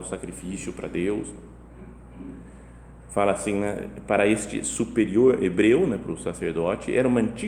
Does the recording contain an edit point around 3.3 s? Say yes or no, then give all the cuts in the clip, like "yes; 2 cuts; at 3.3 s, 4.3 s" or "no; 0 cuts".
no; 0 cuts